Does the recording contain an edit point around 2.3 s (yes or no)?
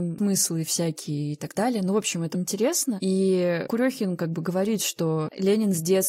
yes